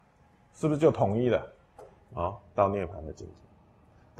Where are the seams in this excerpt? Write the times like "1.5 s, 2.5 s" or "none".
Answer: 2.0 s